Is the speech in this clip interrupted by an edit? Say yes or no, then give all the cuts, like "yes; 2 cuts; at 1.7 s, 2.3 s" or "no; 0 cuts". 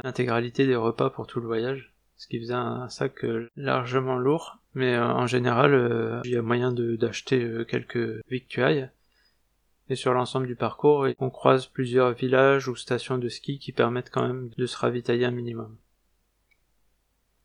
yes; 2 cuts; at 4.7 s, 6.2 s